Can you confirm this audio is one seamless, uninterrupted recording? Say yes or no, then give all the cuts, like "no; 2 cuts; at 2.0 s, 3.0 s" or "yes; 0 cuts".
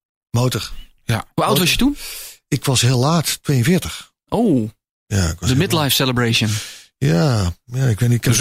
yes; 0 cuts